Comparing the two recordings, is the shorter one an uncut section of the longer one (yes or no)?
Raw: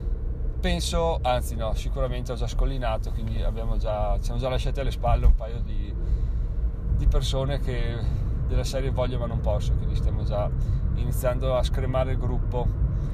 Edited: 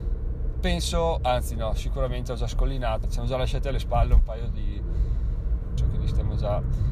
no